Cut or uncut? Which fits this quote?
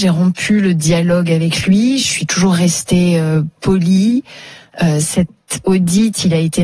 uncut